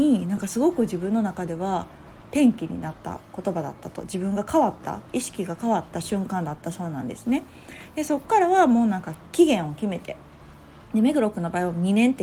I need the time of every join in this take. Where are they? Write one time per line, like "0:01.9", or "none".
none